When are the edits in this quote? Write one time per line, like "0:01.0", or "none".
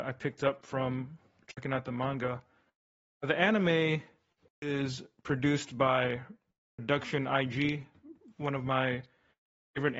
none